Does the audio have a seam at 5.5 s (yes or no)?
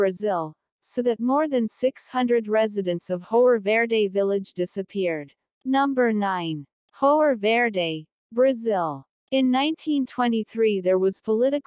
yes